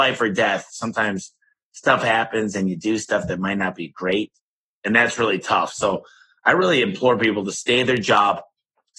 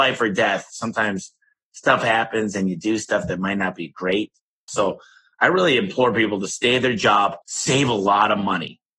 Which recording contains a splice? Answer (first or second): second